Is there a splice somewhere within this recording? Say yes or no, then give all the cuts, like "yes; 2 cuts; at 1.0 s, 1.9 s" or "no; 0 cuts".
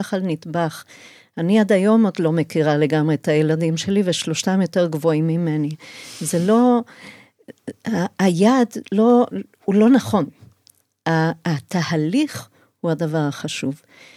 no; 0 cuts